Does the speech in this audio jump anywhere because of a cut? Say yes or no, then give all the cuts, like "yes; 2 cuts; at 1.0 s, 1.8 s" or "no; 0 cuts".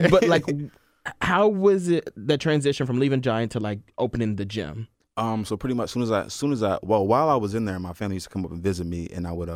no; 0 cuts